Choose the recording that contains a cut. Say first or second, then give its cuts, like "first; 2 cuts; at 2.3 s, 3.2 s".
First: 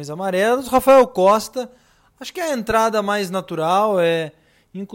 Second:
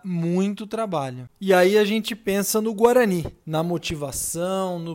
second; 1 cut; at 3.4 s